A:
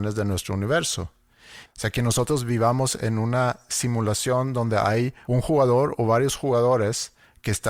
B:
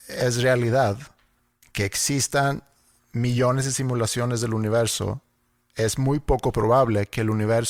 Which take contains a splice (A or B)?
A